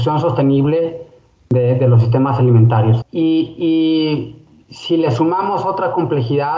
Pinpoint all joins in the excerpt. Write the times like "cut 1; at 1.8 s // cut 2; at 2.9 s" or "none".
cut 1; at 3.0 s